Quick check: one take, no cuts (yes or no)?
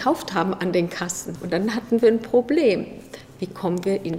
no